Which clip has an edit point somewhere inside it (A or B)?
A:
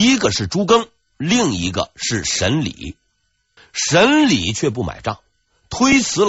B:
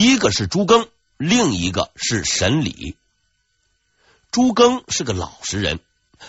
A